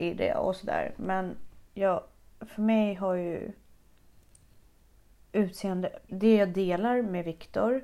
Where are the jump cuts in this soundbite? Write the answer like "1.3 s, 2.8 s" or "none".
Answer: 1.6 s, 6.1 s